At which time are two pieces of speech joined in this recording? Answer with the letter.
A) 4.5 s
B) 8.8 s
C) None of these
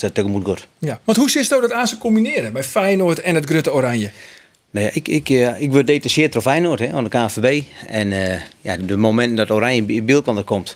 B